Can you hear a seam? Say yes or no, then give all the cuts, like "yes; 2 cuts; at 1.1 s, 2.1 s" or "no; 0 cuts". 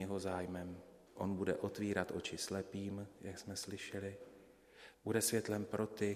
yes; 2 cuts; at 1.1 s, 4.9 s